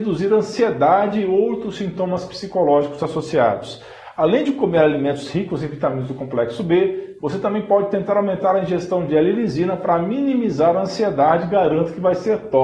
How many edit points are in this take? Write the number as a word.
one